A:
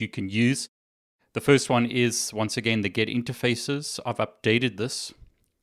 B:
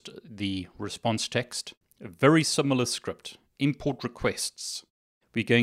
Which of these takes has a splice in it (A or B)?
B